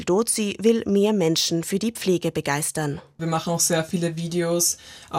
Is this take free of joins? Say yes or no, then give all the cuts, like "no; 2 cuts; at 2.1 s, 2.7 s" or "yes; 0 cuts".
yes; 0 cuts